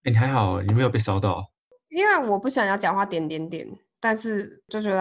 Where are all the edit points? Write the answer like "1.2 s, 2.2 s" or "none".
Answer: none